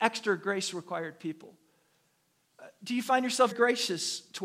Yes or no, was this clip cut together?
yes